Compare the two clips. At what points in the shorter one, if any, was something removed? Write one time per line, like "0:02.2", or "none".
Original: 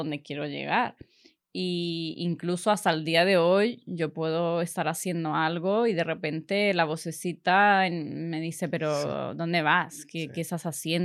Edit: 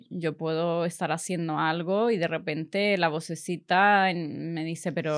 none